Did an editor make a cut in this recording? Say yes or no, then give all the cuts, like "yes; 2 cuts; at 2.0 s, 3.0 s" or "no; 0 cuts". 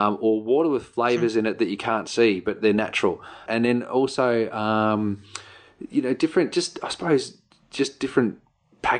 yes; 1 cut; at 3.5 s